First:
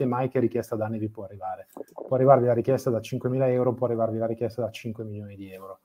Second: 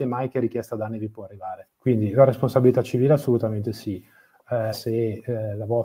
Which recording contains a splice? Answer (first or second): second